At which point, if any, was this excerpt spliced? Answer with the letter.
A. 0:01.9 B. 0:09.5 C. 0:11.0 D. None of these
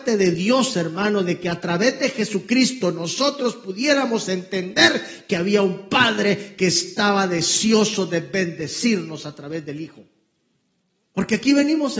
C